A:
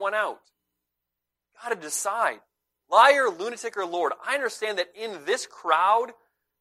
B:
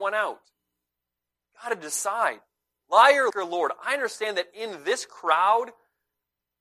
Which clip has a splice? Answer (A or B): B